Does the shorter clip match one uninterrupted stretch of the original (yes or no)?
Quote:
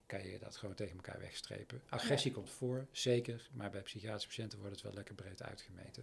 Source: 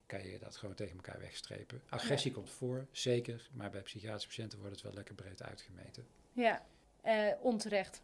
yes